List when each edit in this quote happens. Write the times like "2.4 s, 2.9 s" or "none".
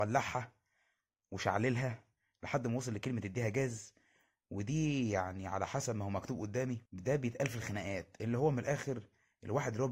6.9 s